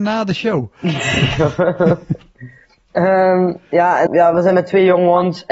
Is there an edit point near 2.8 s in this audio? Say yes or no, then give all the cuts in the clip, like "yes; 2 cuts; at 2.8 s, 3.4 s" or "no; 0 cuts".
no; 1 cut; at 4.1 s